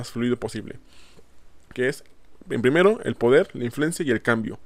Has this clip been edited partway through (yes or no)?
yes